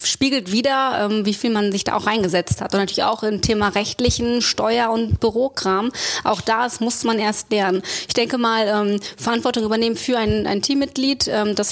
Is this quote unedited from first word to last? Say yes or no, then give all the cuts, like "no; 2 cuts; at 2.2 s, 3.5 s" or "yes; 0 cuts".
yes; 0 cuts